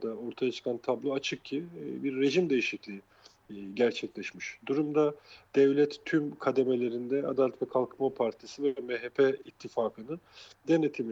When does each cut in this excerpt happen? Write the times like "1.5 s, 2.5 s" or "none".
none